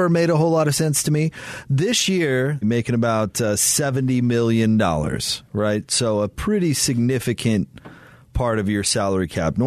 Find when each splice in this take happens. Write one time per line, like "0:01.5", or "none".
0:02.6